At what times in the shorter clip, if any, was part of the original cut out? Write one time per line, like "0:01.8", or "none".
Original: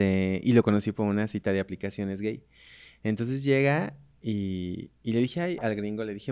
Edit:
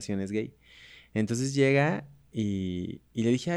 none